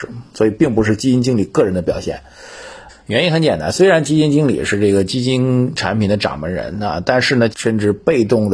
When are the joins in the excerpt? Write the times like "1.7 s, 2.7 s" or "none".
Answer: 2.9 s, 7.5 s